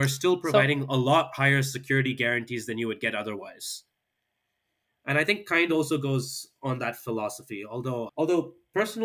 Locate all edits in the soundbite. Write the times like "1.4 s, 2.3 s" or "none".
8.1 s